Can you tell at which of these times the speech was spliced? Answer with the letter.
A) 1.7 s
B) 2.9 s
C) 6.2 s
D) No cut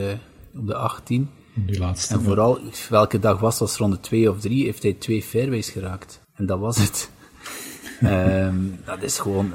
C